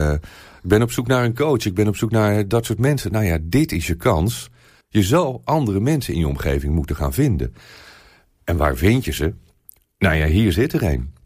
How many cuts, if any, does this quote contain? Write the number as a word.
two